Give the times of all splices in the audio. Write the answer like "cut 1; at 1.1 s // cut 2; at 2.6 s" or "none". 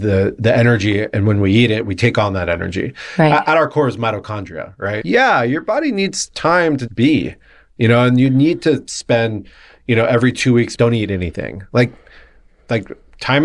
cut 1; at 5.0 s // cut 2; at 6.9 s // cut 3; at 10.8 s